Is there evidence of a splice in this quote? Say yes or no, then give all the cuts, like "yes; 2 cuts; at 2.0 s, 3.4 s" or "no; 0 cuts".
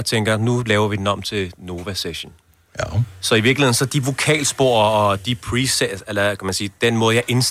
no; 0 cuts